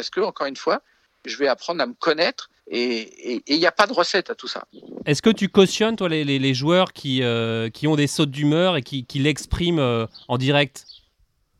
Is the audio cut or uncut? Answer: cut